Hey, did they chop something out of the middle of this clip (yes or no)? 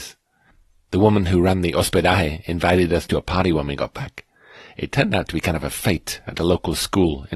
no